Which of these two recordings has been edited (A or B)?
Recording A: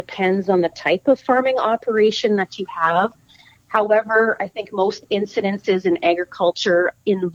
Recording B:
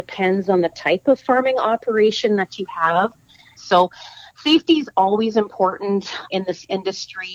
B